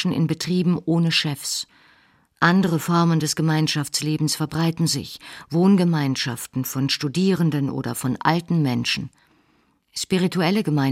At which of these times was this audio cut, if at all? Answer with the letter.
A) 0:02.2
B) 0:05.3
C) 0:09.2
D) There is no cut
D